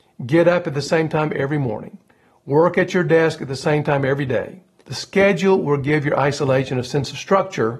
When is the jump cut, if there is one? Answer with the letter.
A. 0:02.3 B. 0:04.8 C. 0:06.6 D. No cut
B